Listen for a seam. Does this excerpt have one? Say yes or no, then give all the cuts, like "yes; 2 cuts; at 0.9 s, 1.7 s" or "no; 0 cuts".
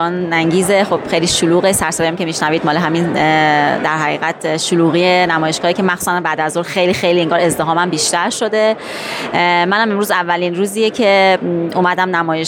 no; 0 cuts